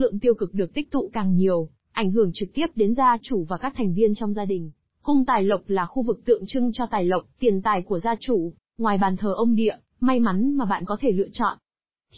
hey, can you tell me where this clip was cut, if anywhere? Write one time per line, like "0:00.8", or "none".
0:04.8
0:08.6
0:09.9